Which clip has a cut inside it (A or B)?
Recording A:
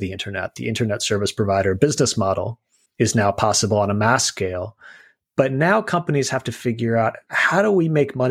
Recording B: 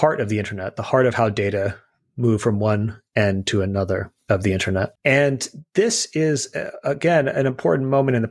B